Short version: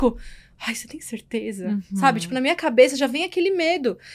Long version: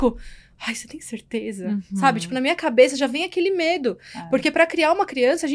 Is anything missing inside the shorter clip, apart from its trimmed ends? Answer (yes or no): no